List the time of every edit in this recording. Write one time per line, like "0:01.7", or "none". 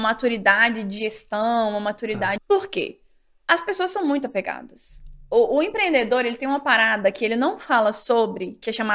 0:02.4